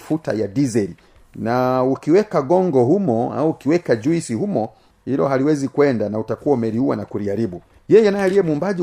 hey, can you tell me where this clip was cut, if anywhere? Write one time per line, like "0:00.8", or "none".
none